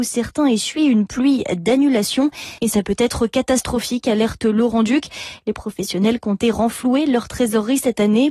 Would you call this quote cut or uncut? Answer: cut